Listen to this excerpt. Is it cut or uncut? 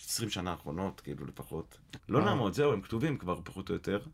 cut